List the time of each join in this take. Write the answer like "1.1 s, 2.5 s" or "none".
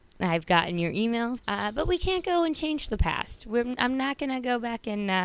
1.4 s